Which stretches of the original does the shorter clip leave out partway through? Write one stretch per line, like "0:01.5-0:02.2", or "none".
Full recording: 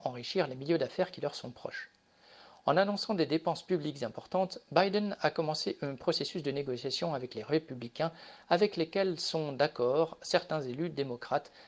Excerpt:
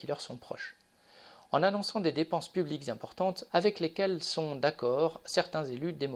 0:04.6-0:08.4